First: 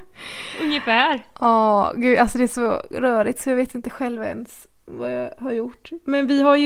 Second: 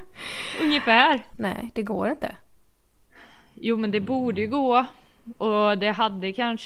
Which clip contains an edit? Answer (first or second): second